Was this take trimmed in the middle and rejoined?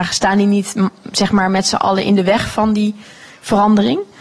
no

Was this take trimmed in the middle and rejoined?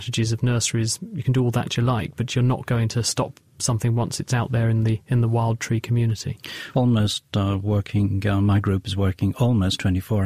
yes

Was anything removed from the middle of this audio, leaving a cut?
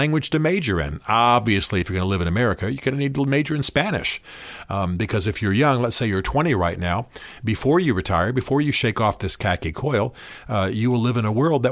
no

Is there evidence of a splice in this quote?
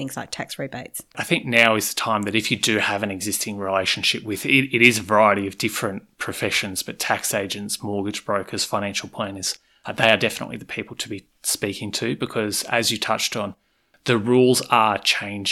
no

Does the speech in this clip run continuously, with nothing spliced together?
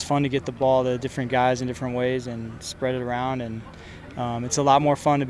yes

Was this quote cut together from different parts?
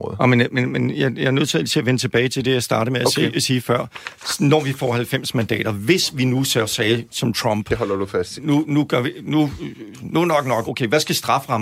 yes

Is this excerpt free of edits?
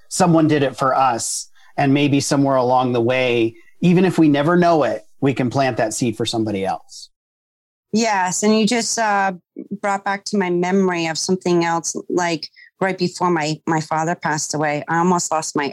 yes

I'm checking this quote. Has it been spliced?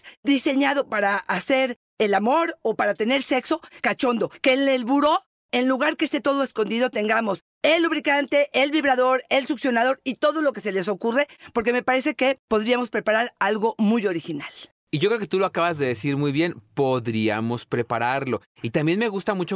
no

